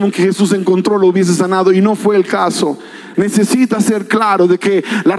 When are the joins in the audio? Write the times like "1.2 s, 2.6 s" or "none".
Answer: 3.1 s